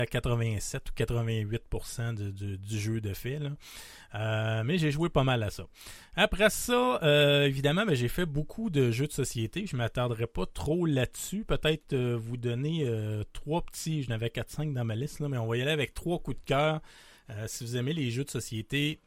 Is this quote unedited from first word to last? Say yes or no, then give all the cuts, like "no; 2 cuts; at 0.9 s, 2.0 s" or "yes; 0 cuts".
yes; 0 cuts